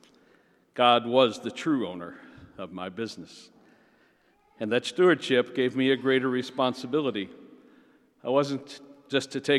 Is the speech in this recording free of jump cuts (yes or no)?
yes